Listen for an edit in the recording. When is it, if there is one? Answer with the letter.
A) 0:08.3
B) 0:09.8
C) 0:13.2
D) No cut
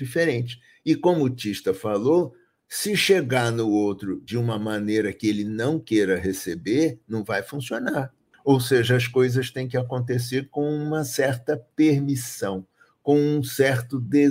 A